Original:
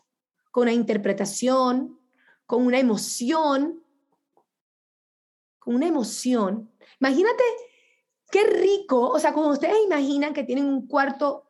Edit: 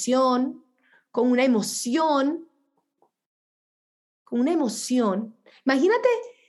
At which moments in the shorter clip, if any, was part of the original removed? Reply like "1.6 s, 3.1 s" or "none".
none